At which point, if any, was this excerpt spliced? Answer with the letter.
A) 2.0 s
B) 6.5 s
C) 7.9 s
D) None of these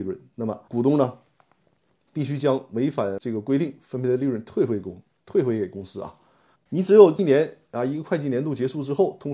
B